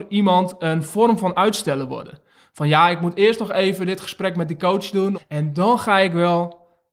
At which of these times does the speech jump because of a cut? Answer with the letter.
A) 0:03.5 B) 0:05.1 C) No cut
B